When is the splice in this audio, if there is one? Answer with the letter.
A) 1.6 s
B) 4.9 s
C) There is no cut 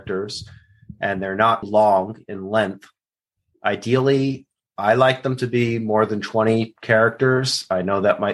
A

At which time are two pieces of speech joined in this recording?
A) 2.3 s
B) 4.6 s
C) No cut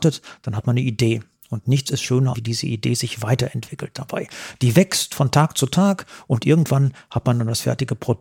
A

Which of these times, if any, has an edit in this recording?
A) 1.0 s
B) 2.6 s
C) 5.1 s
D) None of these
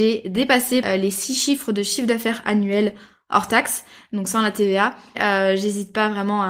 C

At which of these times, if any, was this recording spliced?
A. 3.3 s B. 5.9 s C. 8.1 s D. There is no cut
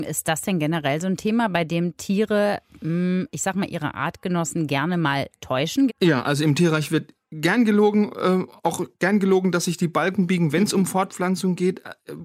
B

